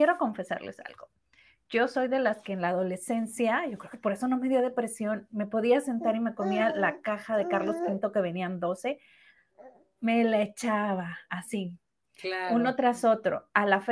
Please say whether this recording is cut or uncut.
uncut